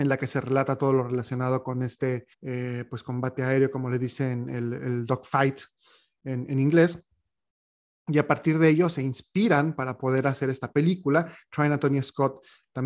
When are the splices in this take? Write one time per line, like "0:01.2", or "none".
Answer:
0:02.3